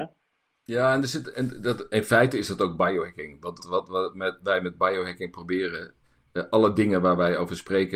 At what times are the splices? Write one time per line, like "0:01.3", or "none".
0:03.6